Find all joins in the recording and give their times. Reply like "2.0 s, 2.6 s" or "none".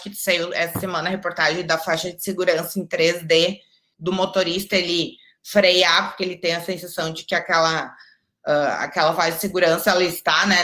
3.9 s